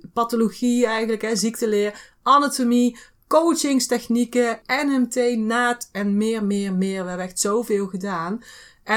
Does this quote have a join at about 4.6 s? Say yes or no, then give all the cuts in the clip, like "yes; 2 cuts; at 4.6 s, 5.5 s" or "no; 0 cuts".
yes; 1 cut; at 4.6 s